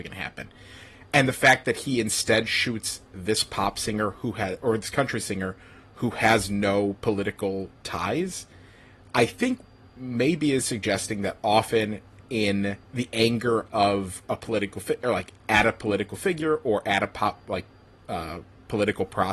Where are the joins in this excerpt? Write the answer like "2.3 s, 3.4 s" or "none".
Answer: 12.8 s